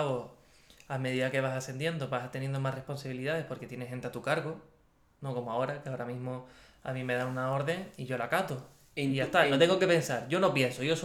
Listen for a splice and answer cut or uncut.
uncut